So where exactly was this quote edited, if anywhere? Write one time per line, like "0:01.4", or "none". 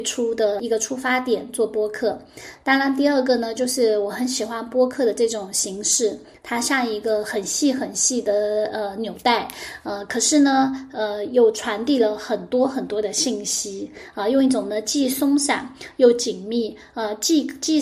none